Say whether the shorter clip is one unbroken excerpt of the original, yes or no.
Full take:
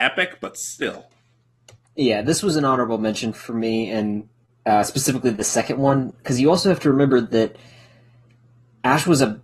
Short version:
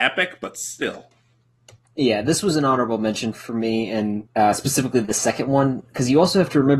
no